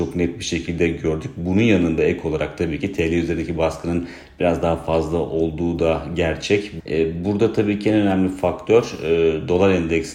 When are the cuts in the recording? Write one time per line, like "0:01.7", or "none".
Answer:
0:06.8